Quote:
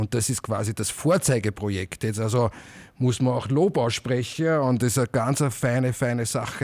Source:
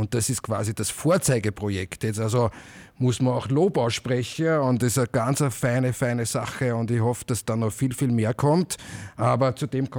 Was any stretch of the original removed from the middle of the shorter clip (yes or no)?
no